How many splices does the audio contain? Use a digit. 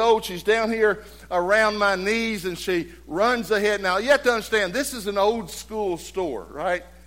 0